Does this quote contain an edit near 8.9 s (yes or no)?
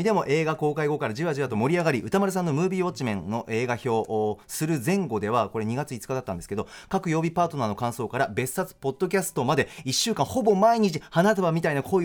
no